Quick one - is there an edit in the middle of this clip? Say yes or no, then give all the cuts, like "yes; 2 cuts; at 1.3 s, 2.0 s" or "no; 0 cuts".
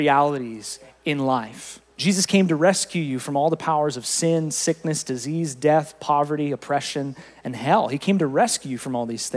yes; 1 cut; at 1.9 s